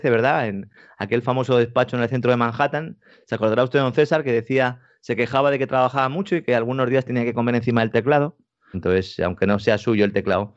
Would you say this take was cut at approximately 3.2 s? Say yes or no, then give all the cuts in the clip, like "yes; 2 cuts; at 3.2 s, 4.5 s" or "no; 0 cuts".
no; 1 cut; at 8.7 s